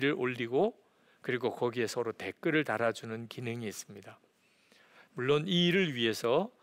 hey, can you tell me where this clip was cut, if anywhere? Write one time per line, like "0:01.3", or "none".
0:05.1